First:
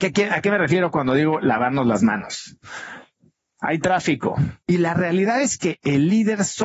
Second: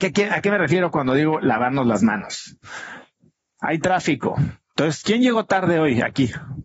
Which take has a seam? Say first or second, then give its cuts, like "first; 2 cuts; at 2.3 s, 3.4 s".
first; 1 cut; at 4.6 s